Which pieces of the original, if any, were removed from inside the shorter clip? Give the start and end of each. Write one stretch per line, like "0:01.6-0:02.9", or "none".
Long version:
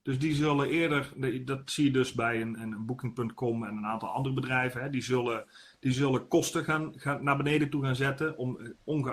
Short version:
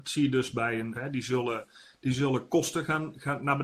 0:02.6-0:04.7